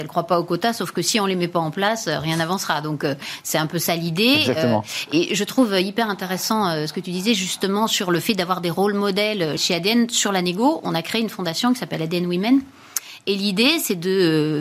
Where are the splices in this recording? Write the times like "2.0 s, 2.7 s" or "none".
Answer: 9.6 s